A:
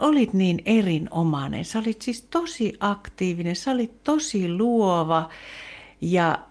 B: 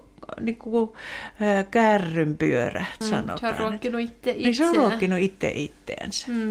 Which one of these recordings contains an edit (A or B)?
B